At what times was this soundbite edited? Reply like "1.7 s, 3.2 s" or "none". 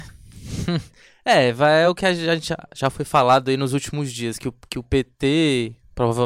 none

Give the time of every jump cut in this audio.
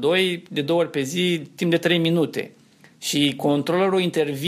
none

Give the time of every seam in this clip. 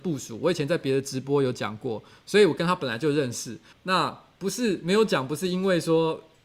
3.7 s

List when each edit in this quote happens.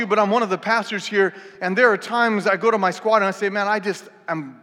none

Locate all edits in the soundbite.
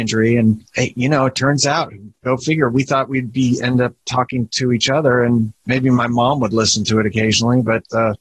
none

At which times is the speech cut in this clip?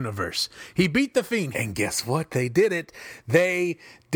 1.5 s

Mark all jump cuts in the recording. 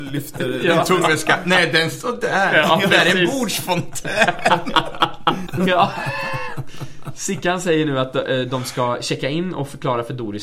5.5 s

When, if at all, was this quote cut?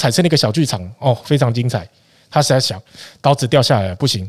none

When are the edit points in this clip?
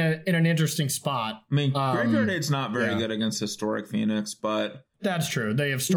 4.9 s

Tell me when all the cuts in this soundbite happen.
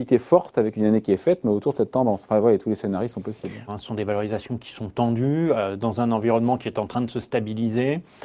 3.7 s

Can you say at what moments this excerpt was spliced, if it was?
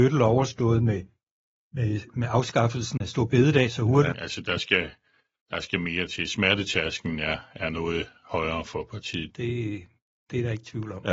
4.1 s, 9.3 s

